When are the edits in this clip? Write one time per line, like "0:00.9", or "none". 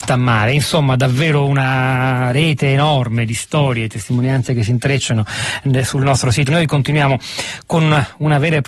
0:06.5